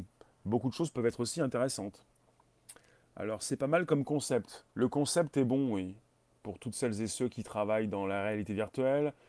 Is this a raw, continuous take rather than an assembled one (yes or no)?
no